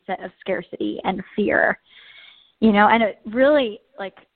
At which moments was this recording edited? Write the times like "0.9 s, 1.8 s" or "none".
none